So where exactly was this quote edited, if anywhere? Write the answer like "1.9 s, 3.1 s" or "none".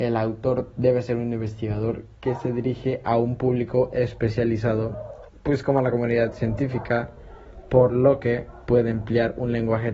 5.3 s